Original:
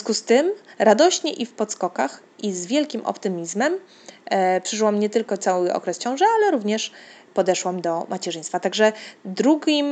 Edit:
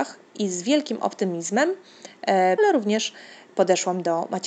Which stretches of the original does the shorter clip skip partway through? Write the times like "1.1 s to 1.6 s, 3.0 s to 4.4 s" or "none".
4.6 s to 6.4 s